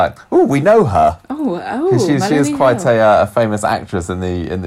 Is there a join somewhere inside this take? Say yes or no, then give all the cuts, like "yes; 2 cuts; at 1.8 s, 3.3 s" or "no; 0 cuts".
no; 0 cuts